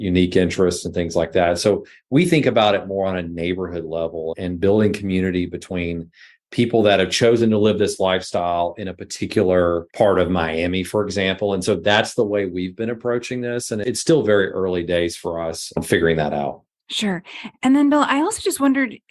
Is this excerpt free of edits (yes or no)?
yes